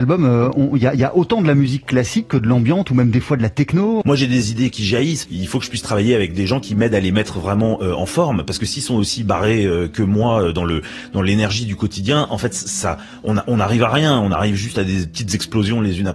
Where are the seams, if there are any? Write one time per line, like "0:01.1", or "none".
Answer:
0:04.0
0:05.2